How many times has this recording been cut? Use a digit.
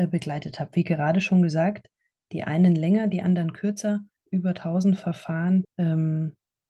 2